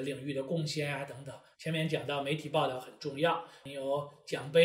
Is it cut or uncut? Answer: cut